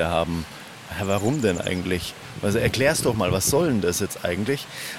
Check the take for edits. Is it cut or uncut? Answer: uncut